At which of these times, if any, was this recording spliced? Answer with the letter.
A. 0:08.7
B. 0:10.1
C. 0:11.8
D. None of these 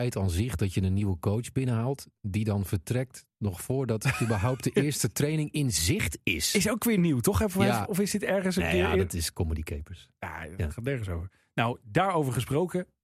D